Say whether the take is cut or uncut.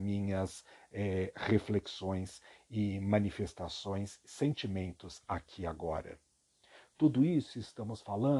uncut